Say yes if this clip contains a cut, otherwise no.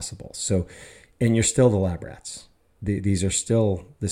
no